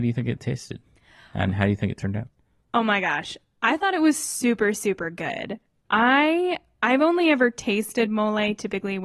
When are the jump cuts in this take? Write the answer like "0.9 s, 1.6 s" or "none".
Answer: none